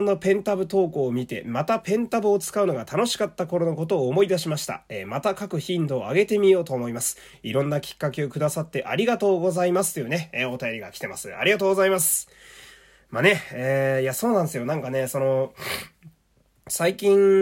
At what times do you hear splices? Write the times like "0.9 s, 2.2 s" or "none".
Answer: none